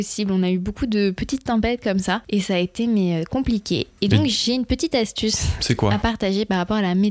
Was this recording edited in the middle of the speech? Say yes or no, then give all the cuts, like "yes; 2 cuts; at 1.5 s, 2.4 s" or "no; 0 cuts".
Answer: no; 0 cuts